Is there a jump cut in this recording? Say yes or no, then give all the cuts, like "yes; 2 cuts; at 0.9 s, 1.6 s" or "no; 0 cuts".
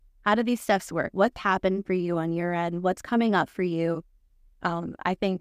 no; 0 cuts